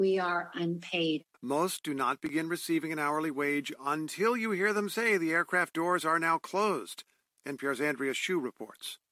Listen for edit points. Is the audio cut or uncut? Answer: cut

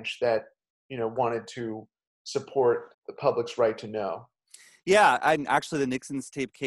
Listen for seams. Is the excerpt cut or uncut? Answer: cut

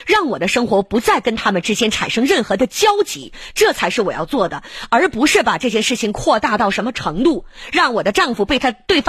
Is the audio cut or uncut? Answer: uncut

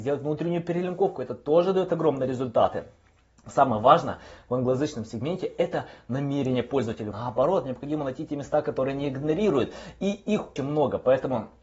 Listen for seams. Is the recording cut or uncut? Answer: cut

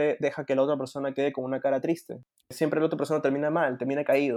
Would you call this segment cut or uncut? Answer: cut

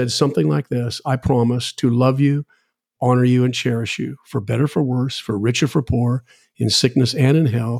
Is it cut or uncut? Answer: uncut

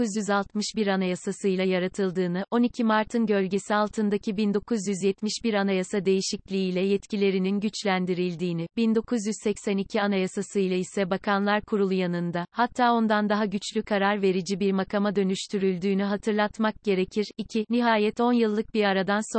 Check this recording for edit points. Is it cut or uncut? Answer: uncut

